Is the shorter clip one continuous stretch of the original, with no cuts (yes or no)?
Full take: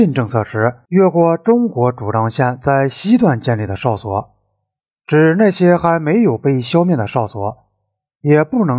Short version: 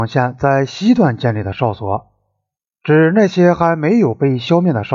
yes